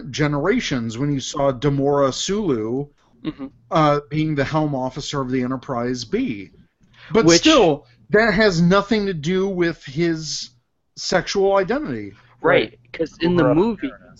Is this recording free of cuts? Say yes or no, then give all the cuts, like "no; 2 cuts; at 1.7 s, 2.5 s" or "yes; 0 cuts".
yes; 0 cuts